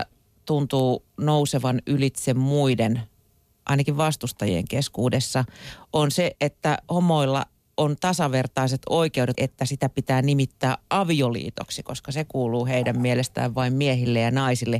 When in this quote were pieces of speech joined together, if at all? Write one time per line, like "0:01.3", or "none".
0:06.4
0:09.3